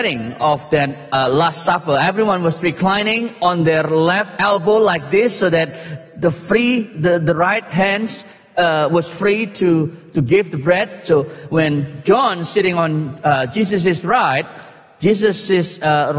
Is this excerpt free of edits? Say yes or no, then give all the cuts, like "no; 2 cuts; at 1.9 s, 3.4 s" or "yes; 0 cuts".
yes; 0 cuts